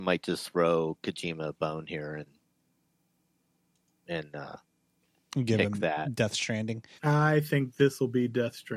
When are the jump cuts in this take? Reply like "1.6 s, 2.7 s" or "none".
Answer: 7.0 s